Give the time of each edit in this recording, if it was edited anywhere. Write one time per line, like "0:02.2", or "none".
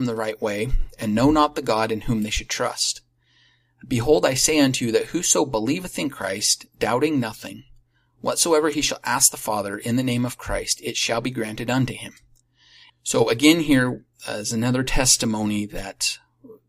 0:12.9
0:14.1